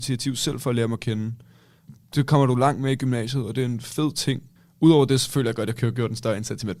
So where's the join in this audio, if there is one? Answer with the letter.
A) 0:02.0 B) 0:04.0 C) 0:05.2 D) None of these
D